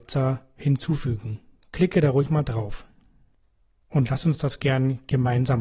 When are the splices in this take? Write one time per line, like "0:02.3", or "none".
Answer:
none